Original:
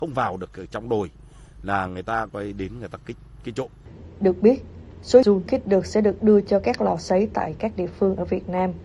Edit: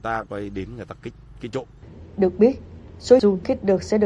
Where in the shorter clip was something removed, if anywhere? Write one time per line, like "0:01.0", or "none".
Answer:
none